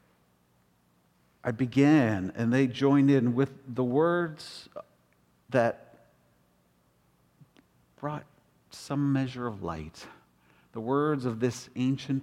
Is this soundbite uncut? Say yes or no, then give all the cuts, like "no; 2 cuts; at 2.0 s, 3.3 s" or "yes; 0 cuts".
yes; 0 cuts